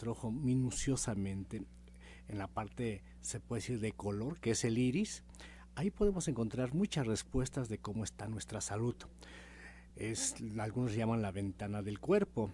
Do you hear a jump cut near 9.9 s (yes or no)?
no